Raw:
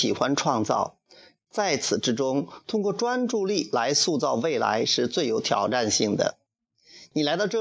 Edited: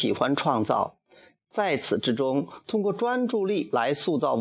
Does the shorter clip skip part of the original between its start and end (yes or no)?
no